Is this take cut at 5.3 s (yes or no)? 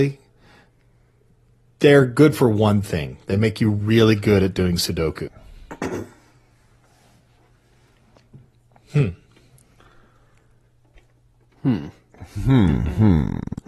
yes